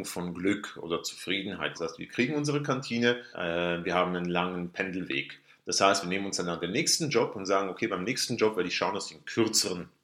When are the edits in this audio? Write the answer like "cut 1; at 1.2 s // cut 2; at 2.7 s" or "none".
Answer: cut 1; at 1.7 s // cut 2; at 3.3 s